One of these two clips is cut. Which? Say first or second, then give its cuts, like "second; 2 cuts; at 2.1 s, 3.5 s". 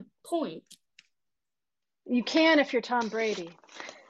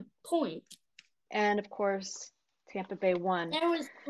second; 1 cut; at 1.3 s